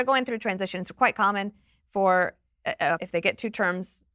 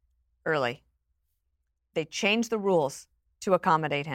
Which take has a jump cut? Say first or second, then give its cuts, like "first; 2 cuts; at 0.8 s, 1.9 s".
first; 1 cut; at 3.0 s